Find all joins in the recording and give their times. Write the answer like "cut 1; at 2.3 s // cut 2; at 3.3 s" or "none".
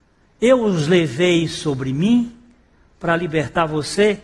none